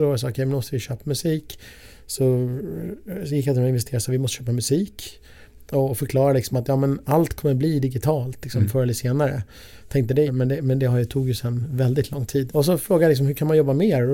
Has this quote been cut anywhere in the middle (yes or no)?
yes